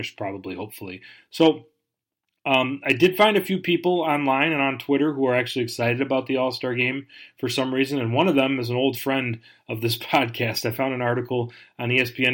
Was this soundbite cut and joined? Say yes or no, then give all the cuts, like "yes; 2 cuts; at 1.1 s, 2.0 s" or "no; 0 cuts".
no; 0 cuts